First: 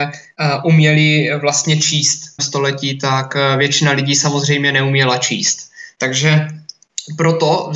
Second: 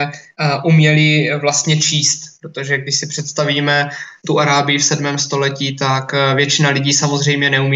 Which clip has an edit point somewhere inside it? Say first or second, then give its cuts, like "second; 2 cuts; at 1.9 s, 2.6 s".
first; 1 cut; at 2.4 s